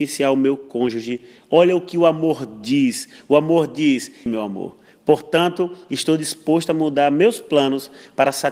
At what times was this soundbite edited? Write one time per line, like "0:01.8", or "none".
0:04.3

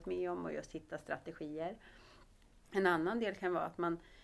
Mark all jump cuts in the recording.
none

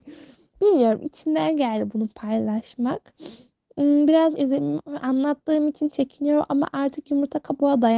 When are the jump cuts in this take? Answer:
0:04.3

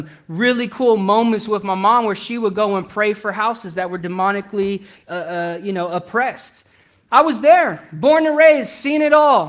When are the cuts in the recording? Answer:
none

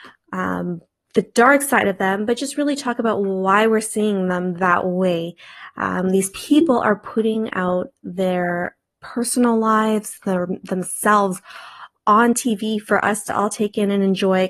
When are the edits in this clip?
none

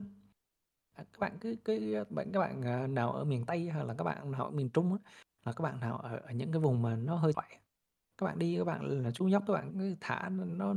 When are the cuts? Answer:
0:07.3
0:09.7

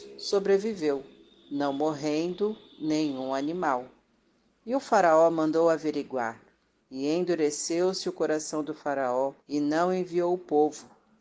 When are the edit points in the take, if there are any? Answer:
0:06.8
0:09.4

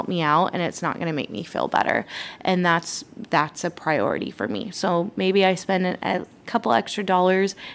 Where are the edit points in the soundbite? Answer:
none

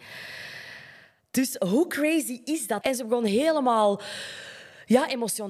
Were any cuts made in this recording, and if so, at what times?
0:02.8

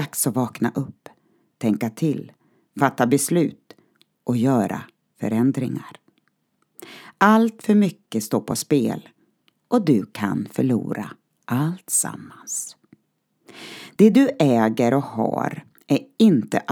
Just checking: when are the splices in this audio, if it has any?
none

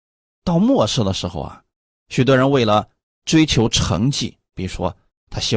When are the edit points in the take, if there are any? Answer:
0:02.0

